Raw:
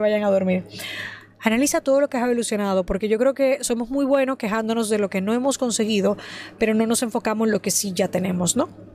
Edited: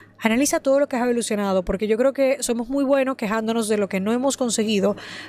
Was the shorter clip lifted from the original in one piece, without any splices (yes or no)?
yes